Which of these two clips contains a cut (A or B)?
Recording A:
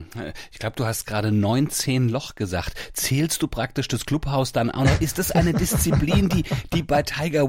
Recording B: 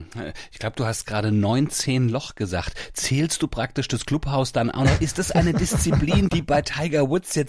B